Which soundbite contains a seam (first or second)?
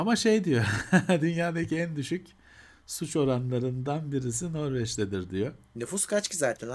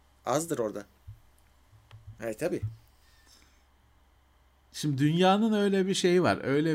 second